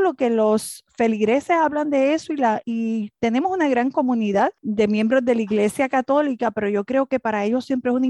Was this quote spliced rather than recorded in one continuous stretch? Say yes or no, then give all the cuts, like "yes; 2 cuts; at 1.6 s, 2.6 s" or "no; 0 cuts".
yes; 2 cuts; at 2.6 s, 4.6 s